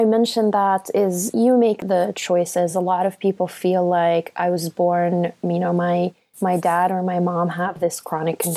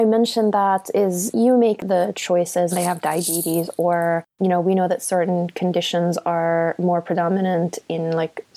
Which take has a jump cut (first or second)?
second